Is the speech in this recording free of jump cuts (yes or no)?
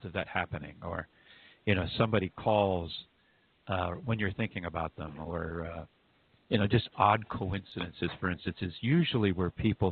yes